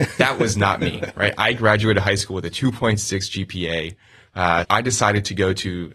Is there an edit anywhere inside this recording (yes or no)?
yes